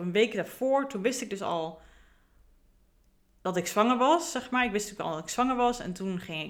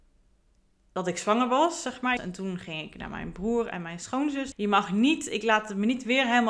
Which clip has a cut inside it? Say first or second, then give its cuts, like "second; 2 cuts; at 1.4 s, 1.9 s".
second; 2 cuts; at 2.2 s, 4.5 s